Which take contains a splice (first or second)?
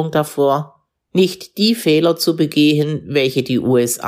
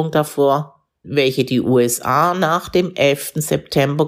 second